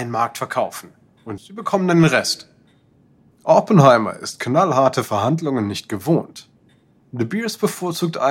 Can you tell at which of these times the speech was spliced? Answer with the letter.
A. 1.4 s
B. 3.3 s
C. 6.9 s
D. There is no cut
A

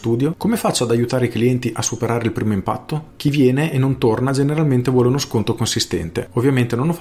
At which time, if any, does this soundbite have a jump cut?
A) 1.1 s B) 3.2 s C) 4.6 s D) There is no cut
B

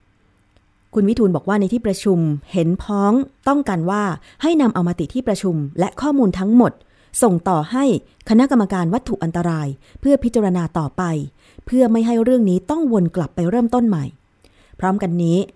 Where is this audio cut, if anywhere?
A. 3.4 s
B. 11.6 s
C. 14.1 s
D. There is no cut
A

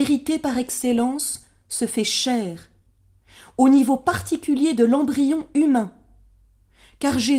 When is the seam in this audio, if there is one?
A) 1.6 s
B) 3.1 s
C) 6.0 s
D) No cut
D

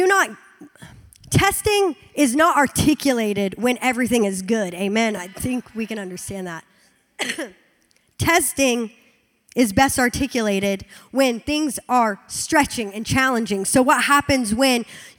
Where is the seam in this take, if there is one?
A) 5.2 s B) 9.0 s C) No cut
C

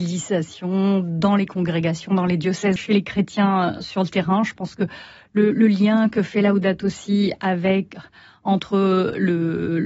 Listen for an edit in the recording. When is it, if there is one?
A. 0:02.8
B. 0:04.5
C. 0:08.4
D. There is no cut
A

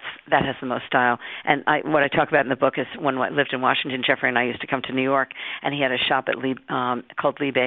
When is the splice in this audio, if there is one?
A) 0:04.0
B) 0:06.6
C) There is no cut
C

